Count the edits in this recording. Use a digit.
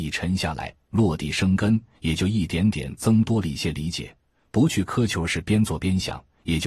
0